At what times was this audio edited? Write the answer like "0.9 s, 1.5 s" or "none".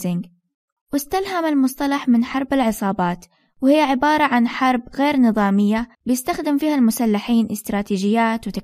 5.9 s